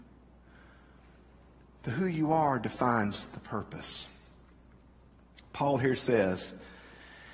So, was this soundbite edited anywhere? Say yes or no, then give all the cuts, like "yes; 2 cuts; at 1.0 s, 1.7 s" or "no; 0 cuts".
no; 0 cuts